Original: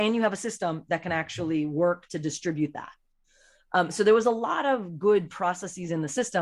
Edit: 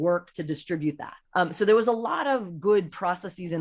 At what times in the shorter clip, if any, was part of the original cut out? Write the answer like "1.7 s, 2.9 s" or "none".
1.2 s